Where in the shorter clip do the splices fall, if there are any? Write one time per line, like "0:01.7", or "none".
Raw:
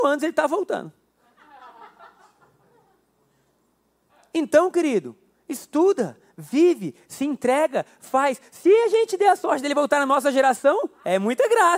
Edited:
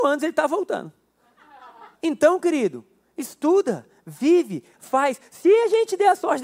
0:02.0
0:04.7